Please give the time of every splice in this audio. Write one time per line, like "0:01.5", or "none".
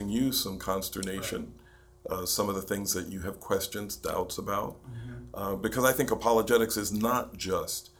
none